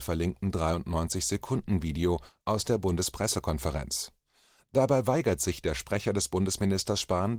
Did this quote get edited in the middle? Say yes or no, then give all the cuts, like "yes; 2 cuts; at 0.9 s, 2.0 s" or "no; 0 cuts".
no; 0 cuts